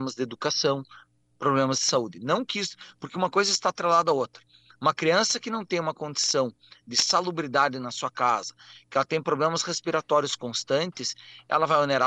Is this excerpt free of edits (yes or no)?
yes